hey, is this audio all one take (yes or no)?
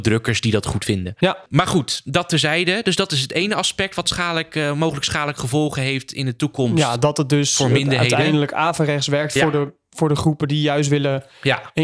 yes